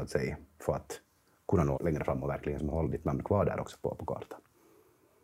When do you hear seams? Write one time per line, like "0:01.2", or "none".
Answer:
0:01.7

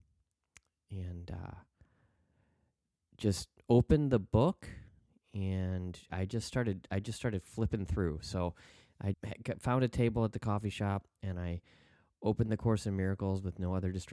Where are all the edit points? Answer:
0:09.1

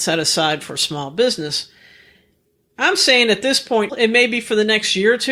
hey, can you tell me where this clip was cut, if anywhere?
0:03.9

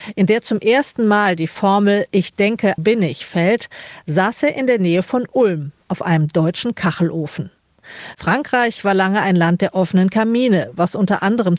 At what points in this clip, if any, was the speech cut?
0:02.8

